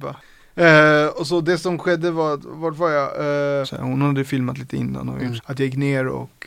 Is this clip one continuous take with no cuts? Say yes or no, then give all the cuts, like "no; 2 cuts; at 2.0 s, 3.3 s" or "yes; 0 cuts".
no; 2 cuts; at 3.6 s, 5.4 s